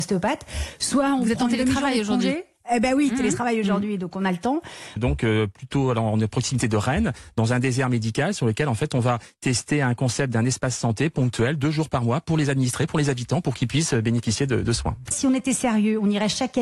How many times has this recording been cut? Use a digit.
2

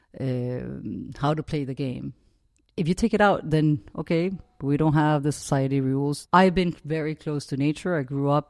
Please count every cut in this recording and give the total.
1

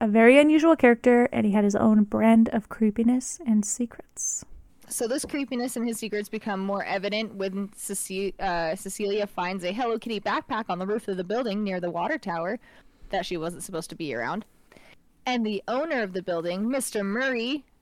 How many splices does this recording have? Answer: 1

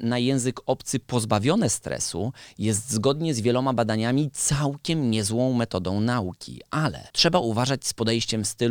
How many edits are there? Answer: 1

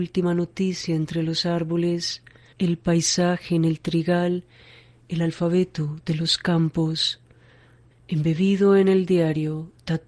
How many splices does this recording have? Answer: 2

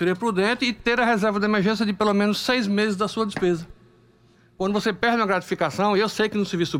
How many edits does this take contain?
0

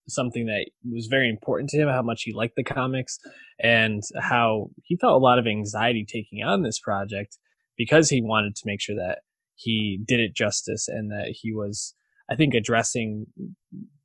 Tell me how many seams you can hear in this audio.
0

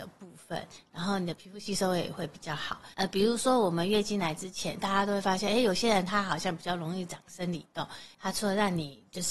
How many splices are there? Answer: 2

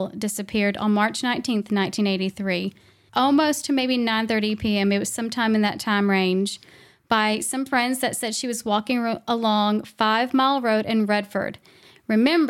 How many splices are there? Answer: 1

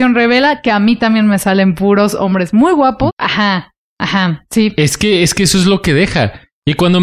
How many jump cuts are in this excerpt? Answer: 1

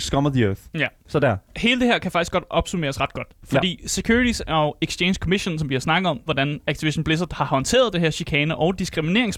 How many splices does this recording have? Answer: 2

